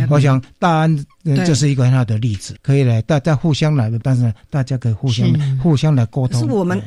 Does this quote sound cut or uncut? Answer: cut